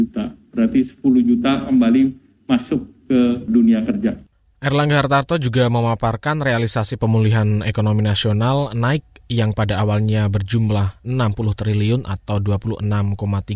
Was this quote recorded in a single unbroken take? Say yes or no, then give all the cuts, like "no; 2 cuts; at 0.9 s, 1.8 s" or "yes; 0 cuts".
yes; 0 cuts